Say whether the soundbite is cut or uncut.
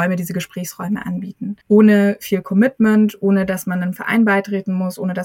cut